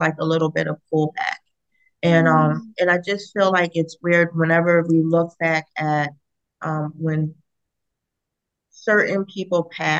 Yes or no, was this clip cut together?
no